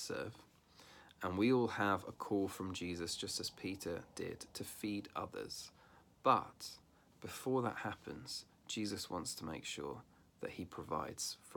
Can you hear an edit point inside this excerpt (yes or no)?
no